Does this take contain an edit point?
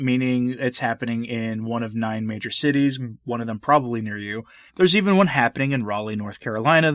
yes; 1 cut; at 4.7 s

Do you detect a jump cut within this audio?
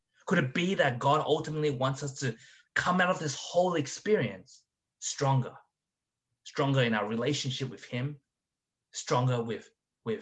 no; 0 cuts

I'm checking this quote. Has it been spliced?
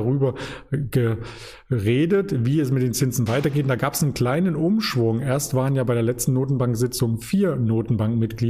no; 0 cuts

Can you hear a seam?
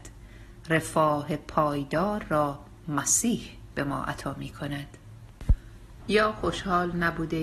yes; 1 cut; at 6.0 s

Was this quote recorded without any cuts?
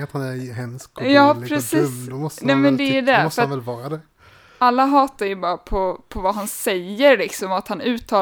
yes; 0 cuts

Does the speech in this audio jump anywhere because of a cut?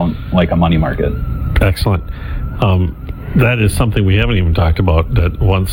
no; 0 cuts

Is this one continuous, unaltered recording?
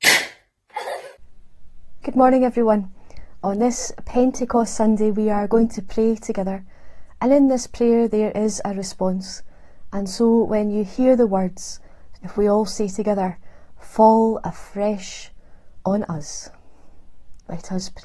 no; 1 cut; at 12.1 s

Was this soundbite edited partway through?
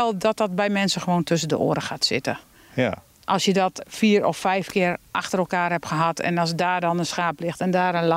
no; 0 cuts

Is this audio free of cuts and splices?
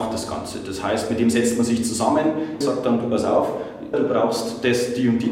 no; 2 cuts; at 2.6 s, 3.9 s

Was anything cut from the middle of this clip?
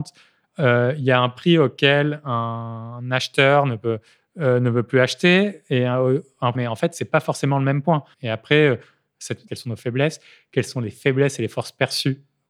yes; 3 cuts; at 6.5 s, 8.1 s, 9.5 s

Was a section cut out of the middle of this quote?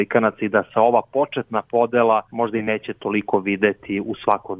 yes; 1 cut; at 2.3 s

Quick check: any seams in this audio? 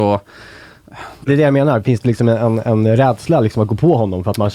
yes; 1 cut; at 1.3 s

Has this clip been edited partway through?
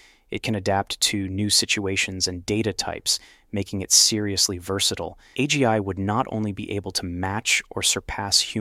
yes; 1 cut; at 5.3 s

